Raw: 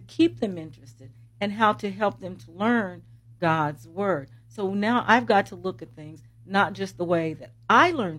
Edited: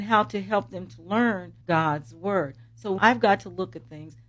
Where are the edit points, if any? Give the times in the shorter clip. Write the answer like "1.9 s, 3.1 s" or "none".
1.6 s, 3.0 s